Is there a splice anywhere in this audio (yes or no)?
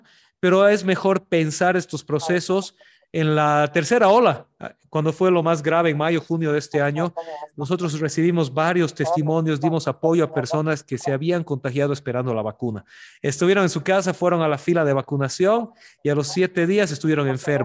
no